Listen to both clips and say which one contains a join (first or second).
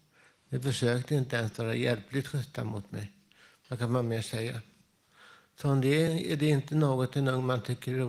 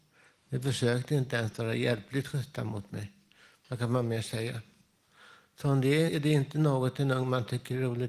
second